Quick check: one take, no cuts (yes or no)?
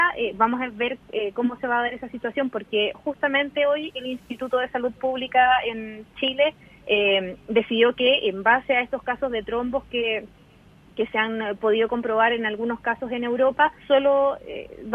no